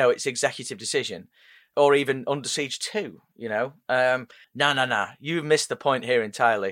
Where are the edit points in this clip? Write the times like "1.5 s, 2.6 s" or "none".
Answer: 4.4 s